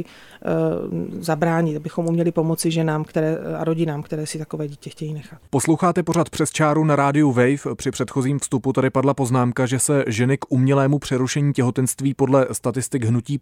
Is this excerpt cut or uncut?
uncut